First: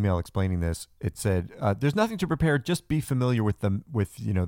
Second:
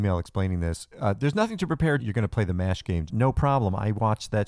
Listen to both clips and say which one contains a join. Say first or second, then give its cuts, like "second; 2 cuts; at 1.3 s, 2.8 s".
second; 3 cuts; at 0.9 s, 2.0 s, 3.1 s